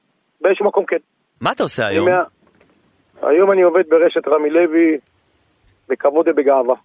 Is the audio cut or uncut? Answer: uncut